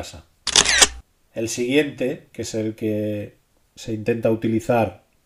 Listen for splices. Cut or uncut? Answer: cut